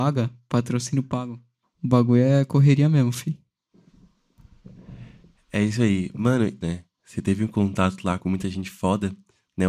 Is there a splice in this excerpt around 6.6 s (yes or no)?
yes